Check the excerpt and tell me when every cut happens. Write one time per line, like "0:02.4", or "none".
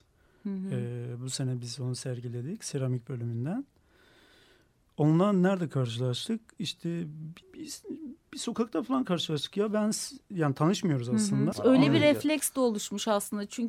0:07.4
0:11.5

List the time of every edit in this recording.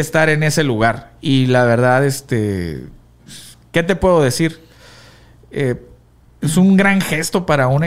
none

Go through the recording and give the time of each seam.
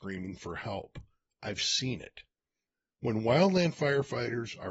none

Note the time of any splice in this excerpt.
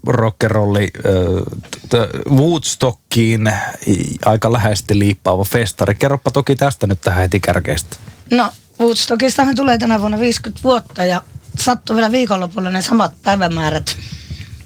none

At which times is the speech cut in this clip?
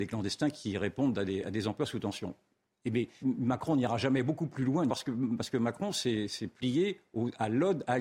0:03.2
0:04.9

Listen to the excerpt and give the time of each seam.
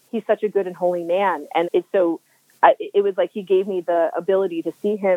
0:01.6

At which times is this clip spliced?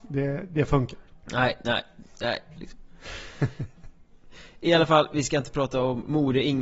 0:02.6

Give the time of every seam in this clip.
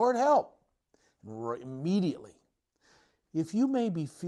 none

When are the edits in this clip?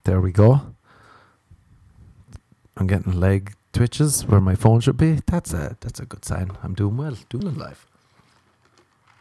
0:07.4

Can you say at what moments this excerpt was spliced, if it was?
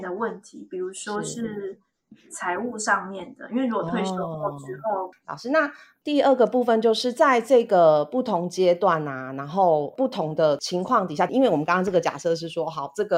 0:05.1
0:11.3

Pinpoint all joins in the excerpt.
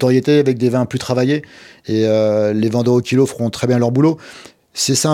none

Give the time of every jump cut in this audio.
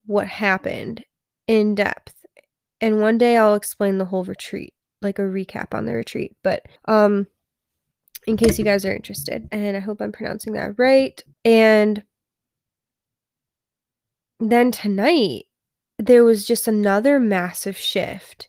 0:06.8
0:09.5
0:11.3

